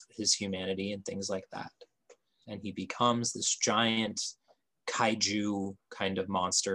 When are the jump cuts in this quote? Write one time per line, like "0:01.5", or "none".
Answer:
0:02.4